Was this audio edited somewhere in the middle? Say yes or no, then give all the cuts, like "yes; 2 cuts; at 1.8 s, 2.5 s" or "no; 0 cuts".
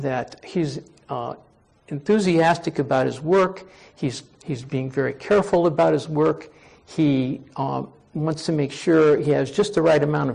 no; 0 cuts